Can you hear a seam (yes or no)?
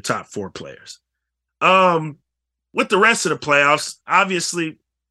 yes